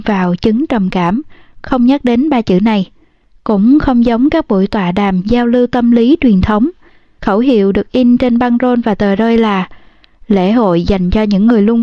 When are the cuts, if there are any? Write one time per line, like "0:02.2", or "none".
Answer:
0:07.2